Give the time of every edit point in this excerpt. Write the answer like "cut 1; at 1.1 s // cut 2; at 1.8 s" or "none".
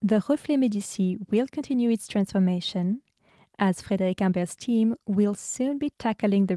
none